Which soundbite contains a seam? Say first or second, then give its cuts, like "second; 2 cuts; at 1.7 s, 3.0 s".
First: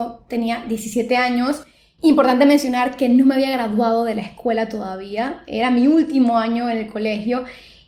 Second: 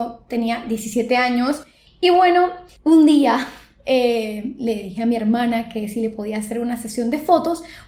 second; 1 cut; at 1.9 s